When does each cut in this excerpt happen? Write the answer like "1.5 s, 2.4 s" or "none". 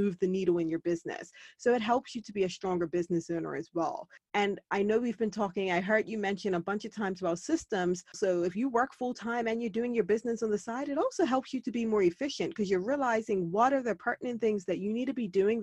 8.1 s